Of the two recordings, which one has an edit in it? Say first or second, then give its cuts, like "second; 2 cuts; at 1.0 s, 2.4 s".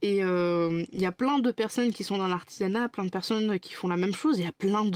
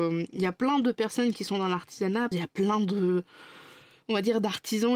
second; 1 cut; at 2.3 s